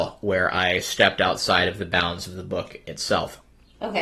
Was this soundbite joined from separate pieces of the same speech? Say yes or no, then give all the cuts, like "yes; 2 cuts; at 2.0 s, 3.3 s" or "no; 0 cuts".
yes; 1 cut; at 2.8 s